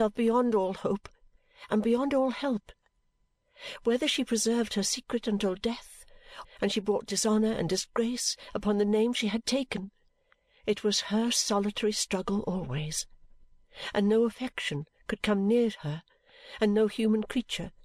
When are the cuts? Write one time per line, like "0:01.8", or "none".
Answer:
0:06.4